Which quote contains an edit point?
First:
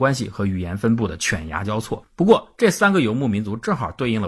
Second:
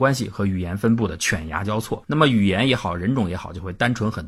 second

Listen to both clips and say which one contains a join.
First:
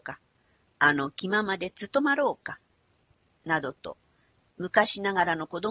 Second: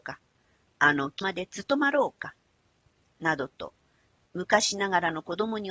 second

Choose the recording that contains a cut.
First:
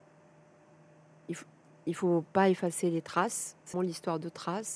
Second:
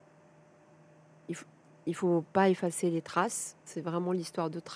first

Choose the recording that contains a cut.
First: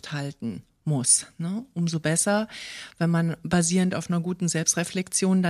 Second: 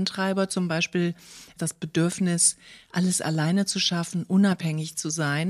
second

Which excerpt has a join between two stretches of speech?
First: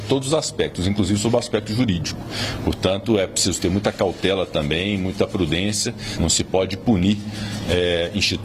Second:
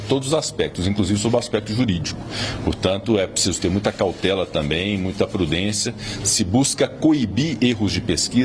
first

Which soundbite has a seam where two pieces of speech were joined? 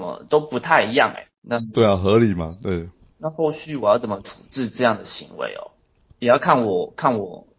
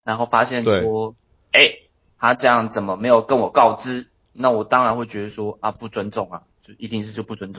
first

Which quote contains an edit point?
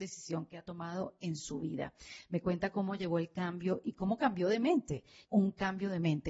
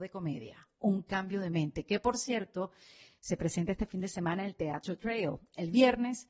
first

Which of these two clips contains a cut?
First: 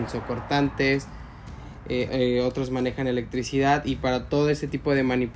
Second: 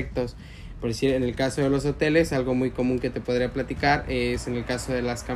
first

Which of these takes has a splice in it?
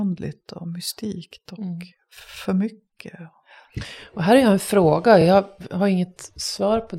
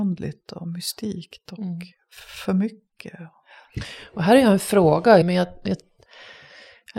second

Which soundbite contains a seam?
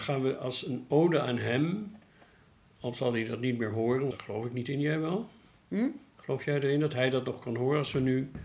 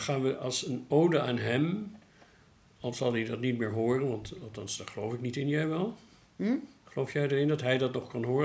first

